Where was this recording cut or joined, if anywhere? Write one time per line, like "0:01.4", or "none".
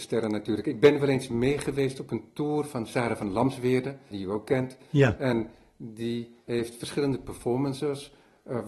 0:04.1